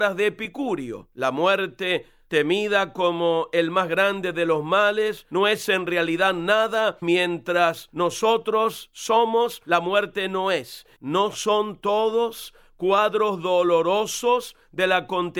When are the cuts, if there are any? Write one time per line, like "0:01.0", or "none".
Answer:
0:07.0
0:11.0